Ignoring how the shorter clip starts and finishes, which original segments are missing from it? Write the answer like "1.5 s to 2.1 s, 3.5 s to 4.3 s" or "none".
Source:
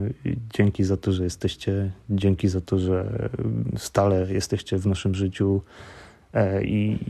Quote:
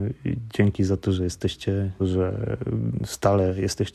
2.0 s to 2.7 s

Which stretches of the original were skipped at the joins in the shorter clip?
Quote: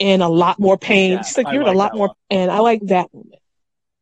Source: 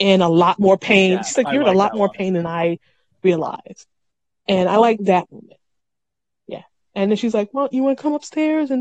2.1 s to 4.3 s

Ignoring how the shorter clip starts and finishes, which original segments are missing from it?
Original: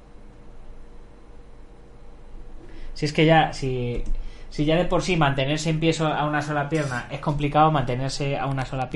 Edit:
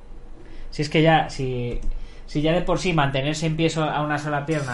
none

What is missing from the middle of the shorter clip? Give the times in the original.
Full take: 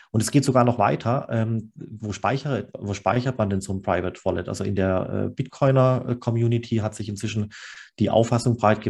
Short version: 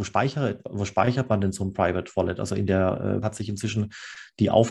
5.3 s to 6.8 s

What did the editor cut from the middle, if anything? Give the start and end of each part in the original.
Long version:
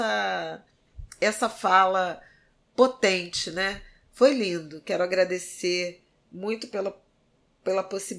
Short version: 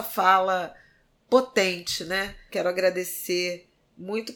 3.9 s to 4.8 s

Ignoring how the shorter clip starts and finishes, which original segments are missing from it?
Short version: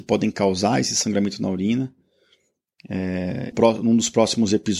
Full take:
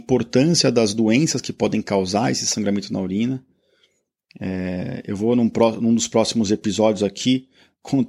5.0 s to 5.5 s

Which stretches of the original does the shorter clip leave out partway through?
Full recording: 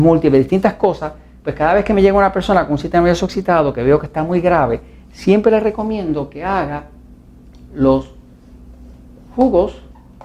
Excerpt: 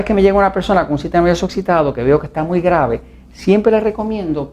none

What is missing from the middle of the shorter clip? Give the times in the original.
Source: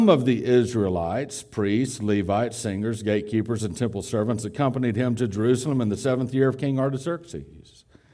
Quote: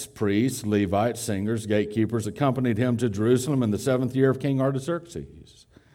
3.6 s to 4.4 s

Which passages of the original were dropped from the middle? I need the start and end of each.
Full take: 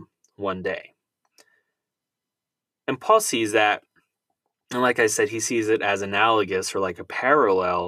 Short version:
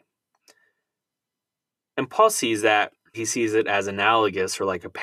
4.0 s to 5.3 s

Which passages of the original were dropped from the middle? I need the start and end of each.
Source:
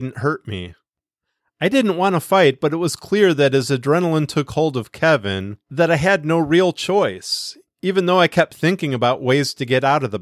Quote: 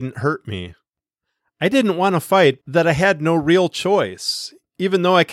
2.6 s to 5.6 s

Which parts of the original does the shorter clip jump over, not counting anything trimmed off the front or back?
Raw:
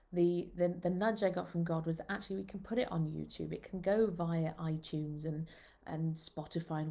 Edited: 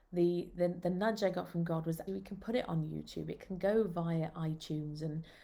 2.1 s to 2.3 s

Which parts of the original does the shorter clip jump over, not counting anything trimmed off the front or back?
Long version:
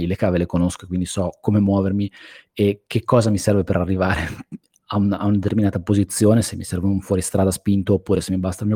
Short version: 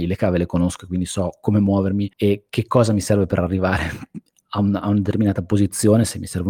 2.1 s to 2.5 s

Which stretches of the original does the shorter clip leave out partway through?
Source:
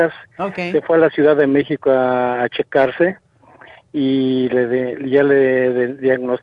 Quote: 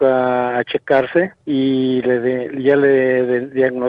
3.3 s to 3.9 s

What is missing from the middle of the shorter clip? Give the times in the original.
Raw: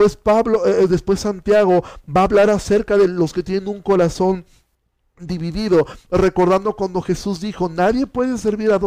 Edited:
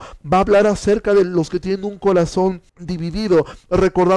4.5 s to 5.1 s

